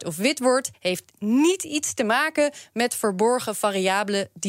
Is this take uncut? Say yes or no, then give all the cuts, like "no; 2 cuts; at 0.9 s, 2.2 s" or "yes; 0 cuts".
yes; 0 cuts